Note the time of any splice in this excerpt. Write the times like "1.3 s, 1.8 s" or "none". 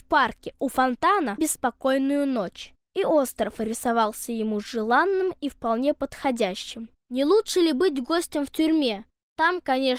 1.4 s, 7.0 s